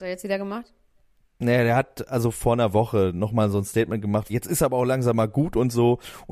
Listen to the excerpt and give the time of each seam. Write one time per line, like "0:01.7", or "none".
0:04.3